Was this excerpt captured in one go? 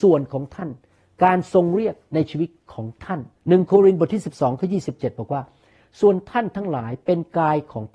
no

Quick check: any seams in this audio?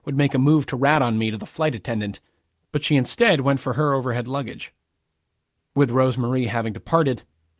no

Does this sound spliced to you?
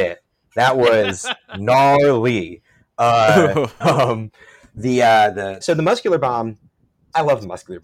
yes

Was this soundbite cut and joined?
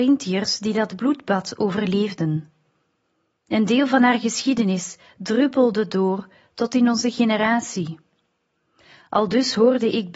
no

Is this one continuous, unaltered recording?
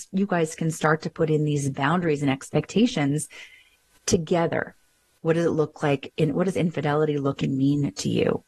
no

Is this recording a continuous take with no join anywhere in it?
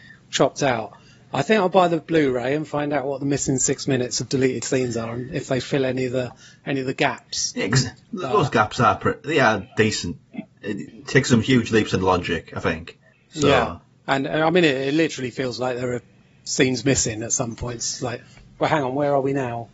yes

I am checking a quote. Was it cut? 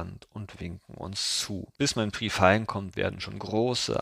yes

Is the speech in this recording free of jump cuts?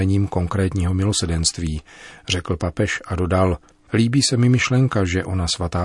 yes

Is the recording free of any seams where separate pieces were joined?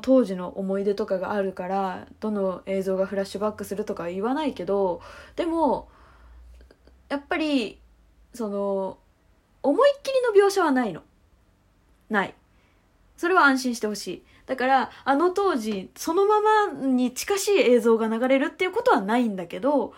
yes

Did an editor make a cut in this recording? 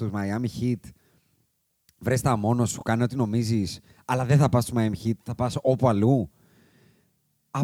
no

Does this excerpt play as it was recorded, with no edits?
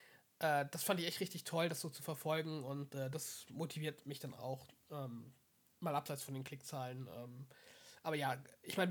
yes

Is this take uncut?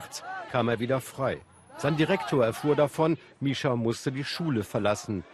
yes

